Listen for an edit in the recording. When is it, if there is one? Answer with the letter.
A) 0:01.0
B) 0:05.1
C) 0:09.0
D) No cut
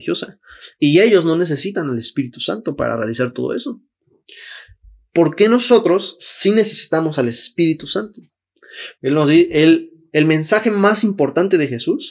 C